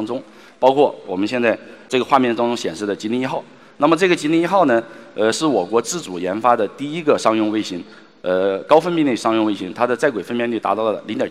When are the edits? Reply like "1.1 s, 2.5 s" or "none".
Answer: none